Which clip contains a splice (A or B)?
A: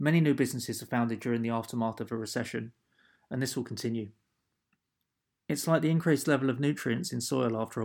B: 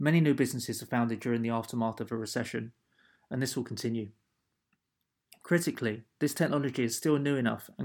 B